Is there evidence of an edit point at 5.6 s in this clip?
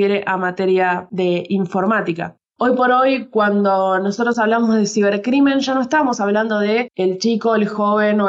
no; 1 cut; at 2.4 s

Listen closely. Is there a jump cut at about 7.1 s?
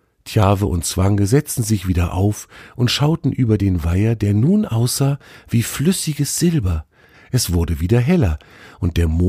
yes; 1 cut; at 7.1 s

